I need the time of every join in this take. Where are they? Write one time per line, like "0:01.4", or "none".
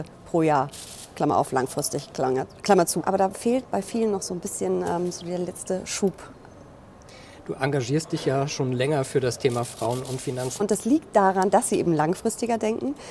0:03.0
0:10.6

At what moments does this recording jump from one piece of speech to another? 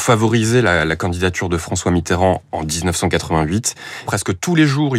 0:04.1

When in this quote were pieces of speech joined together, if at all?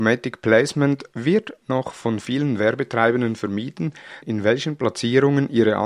0:04.2

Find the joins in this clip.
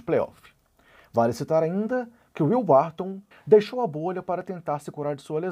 0:03.3

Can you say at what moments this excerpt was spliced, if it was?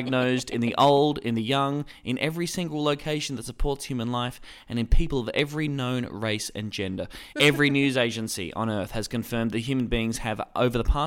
0:07.3

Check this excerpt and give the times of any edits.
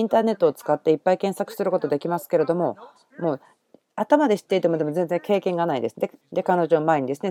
0:06.2

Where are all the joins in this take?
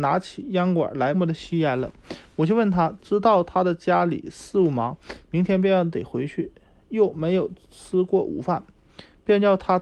0:01.1
0:03.0

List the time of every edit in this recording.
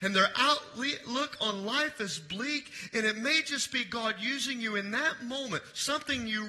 none

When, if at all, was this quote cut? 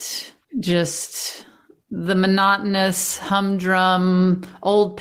none

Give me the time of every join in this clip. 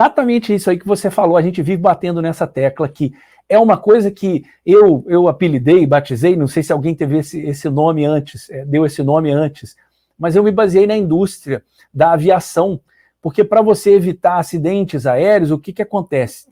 none

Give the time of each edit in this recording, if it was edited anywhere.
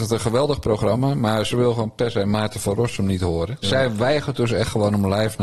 0:03.6

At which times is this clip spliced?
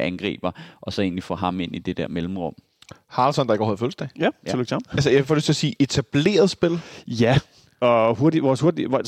0:04.9

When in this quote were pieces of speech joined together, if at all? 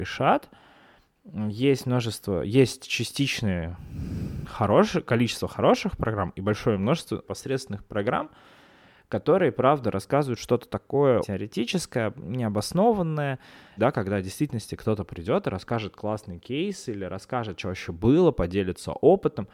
0:07.2
0:11.2
0:13.8

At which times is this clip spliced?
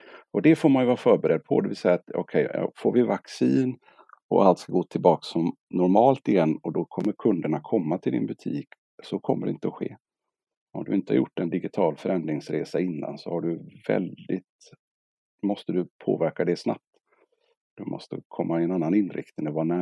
none

